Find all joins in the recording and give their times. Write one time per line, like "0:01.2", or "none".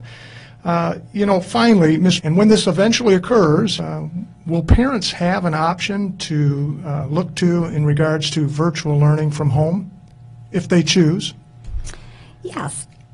0:02.2
0:03.8